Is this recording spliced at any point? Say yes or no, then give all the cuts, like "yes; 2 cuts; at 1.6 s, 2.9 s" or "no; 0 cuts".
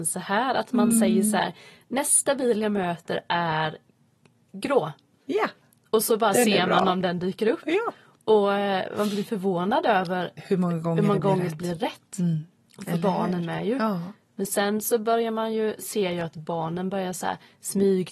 no; 0 cuts